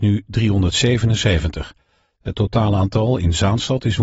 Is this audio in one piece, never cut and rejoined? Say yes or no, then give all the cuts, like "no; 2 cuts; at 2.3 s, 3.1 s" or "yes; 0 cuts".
yes; 0 cuts